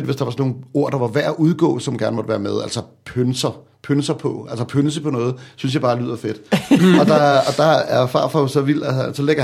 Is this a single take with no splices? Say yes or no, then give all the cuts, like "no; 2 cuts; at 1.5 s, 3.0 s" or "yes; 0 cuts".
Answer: yes; 0 cuts